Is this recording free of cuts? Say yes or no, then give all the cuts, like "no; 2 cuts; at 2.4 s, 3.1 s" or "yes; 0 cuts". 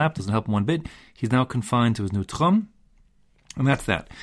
yes; 0 cuts